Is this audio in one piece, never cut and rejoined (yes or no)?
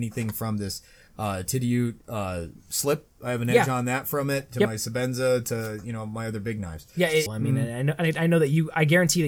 no